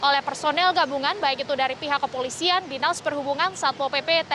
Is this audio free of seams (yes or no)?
yes